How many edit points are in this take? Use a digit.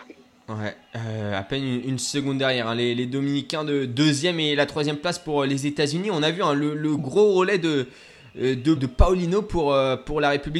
2